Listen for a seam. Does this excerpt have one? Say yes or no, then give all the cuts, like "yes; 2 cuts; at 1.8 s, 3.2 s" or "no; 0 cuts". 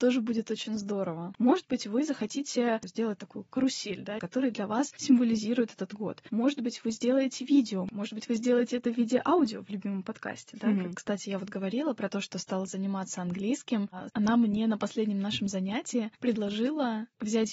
yes; 3 cuts; at 4.2 s, 10.9 s, 14.1 s